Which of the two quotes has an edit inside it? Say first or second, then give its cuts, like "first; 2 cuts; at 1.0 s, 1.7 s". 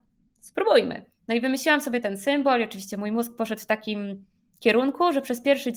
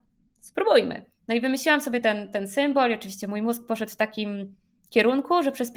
first; 1 cut; at 2.0 s